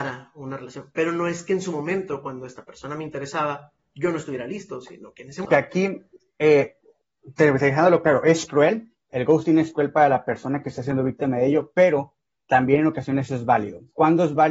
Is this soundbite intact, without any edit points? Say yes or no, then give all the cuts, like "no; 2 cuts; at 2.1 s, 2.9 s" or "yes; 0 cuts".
no; 1 cut; at 5.4 s